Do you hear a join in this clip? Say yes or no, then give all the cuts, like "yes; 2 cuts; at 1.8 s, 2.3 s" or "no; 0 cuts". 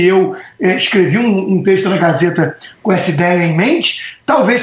no; 0 cuts